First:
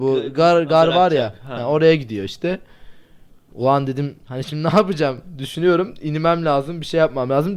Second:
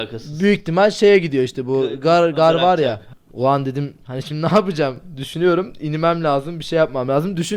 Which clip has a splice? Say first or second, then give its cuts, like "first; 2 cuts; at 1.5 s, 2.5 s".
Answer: second; 1 cut; at 3.1 s